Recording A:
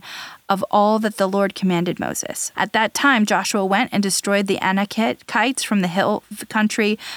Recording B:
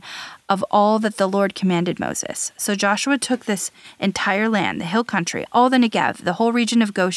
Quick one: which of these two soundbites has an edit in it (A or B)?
A